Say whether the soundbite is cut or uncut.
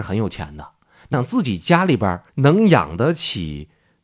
cut